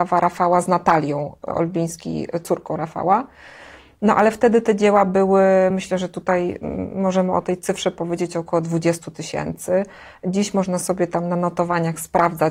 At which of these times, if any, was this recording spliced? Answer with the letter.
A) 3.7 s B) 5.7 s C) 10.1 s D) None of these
D